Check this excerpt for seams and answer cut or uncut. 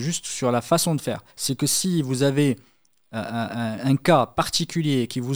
cut